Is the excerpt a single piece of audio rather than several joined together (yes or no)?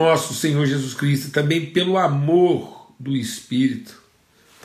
yes